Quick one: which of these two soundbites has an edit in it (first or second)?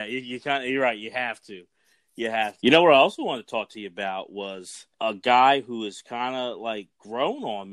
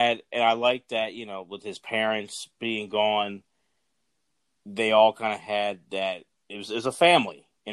first